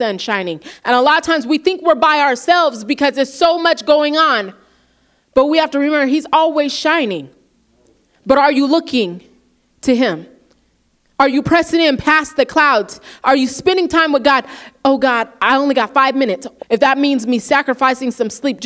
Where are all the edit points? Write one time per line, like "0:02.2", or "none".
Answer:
0:15.4
0:16.6